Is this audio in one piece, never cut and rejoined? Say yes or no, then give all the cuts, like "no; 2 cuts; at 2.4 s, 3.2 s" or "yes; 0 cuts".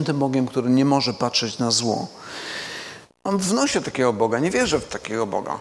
no; 1 cut; at 3.1 s